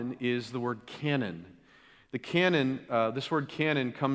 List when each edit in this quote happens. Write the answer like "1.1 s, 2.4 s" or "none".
none